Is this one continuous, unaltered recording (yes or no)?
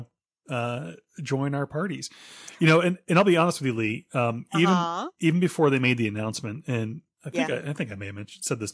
yes